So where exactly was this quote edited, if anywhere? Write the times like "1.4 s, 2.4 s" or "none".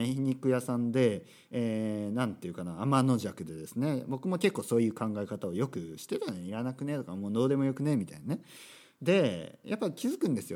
none